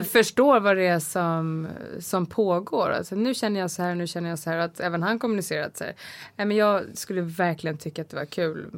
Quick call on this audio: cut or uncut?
uncut